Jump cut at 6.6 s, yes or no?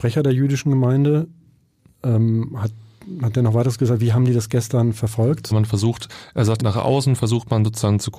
yes